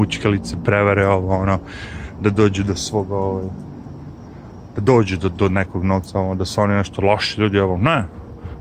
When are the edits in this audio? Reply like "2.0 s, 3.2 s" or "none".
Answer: none